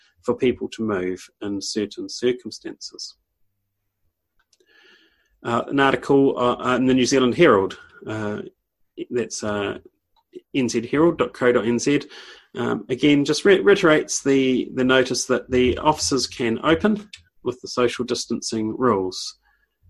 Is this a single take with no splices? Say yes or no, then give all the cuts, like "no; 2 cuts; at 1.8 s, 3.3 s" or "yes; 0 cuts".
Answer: yes; 0 cuts